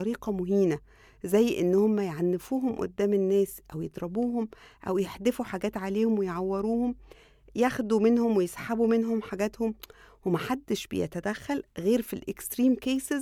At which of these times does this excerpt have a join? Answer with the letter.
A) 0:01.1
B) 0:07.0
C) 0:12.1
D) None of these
D